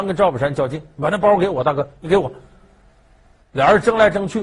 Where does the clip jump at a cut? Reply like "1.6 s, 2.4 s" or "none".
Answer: none